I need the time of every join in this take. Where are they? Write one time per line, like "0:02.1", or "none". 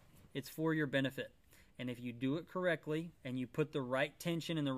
0:03.2

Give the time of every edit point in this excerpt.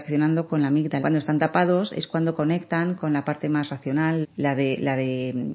0:01.0
0:04.2

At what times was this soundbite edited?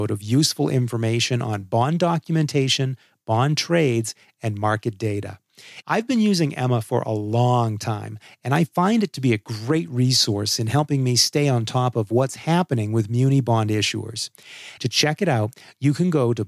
0:05.8
0:14.8

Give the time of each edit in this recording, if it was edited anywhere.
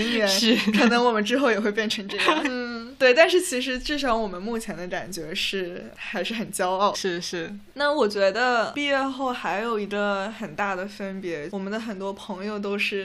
0:02.4
0:06.9
0:11.5

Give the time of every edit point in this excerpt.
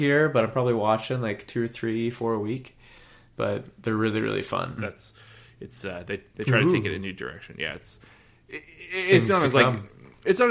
0:04.8

